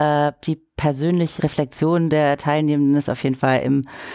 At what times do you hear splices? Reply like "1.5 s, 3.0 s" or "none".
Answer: 1.4 s